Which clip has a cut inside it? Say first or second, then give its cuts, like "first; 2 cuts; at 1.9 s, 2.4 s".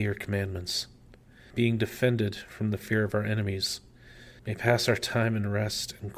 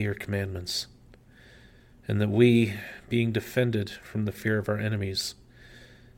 first; 2 cuts; at 1.5 s, 4.4 s